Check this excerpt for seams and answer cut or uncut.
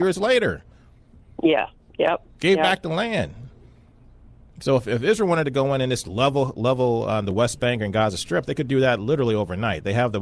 uncut